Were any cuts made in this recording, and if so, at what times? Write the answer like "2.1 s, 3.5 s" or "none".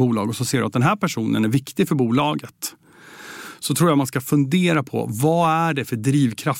none

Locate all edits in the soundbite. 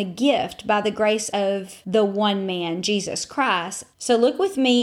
3.9 s

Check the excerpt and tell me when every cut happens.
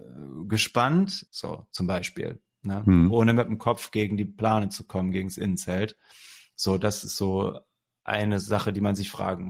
1.3 s

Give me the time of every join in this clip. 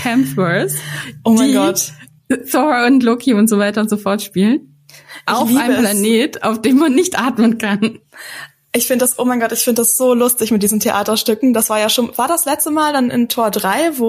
none

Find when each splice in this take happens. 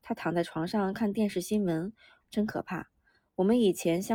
2.2 s

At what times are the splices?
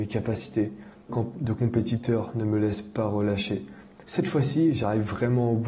1.1 s, 4.0 s

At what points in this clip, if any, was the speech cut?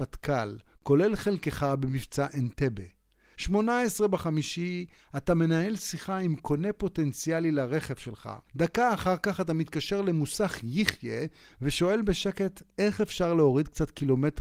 3.3 s, 8.5 s

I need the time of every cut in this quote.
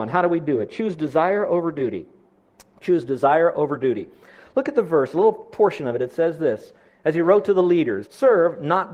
8.0 s

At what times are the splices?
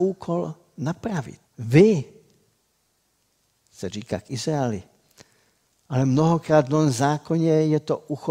1.5 s

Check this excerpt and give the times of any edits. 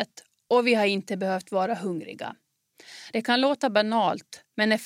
none

